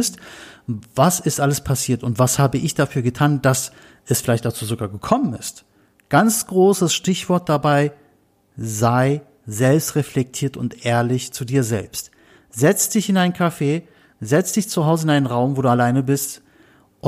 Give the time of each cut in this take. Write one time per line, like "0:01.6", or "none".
none